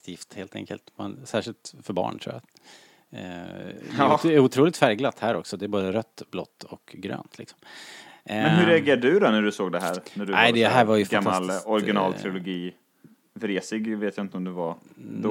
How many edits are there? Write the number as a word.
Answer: zero